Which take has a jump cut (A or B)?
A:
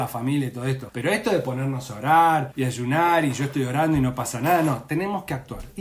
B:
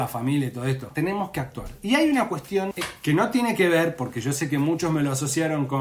B